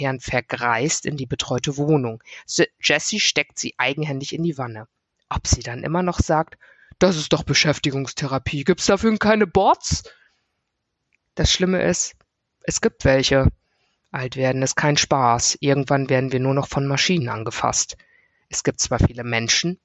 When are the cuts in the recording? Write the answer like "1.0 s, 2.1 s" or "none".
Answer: none